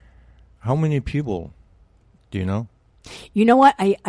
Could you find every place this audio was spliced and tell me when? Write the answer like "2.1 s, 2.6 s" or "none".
2.2 s

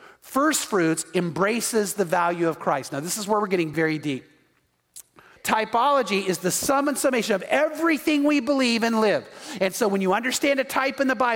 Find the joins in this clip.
3.7 s, 5.4 s

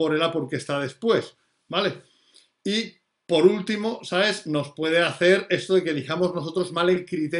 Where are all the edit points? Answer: none

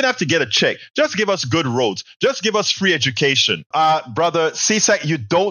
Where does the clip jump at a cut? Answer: 3.7 s

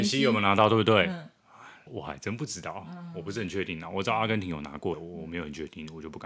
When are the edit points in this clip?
1.9 s, 4.9 s

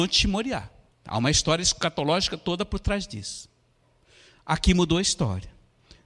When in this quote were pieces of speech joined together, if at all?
0.9 s

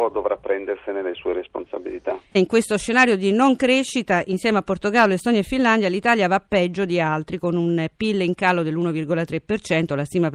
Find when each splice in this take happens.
2.3 s

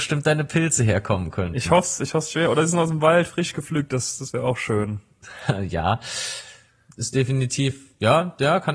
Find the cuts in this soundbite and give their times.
none

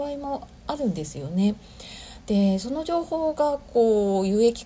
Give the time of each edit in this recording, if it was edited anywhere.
none

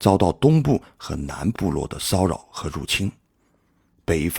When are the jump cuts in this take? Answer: 1.5 s

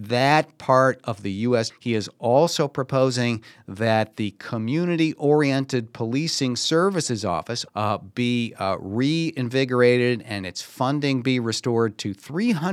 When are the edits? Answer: 1.7 s, 7.7 s

